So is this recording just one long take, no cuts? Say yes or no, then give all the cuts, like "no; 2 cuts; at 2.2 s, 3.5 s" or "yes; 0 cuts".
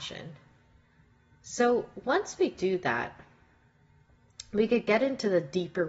yes; 0 cuts